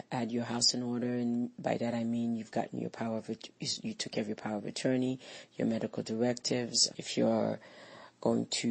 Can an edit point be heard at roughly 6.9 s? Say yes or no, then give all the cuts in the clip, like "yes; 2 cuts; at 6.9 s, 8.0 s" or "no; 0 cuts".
yes; 1 cut; at 6.9 s